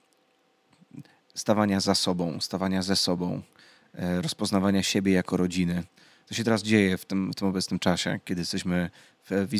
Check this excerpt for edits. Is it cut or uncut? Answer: uncut